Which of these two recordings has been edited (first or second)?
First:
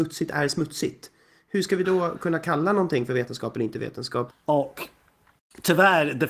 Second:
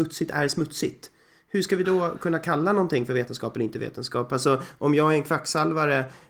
first